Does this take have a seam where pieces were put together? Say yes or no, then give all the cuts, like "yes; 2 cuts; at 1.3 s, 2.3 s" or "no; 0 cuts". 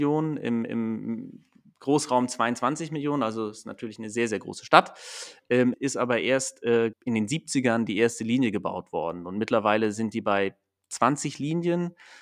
yes; 2 cuts; at 5.7 s, 6.9 s